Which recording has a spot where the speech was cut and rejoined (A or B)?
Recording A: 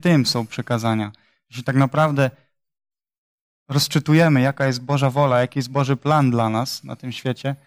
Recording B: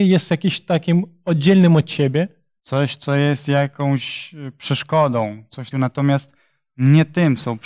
B